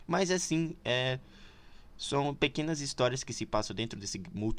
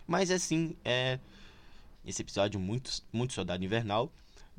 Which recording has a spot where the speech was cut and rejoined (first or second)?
second